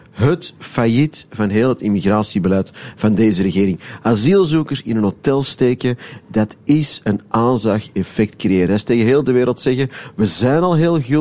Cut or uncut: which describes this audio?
uncut